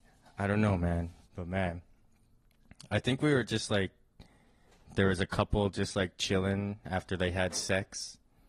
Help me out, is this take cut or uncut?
cut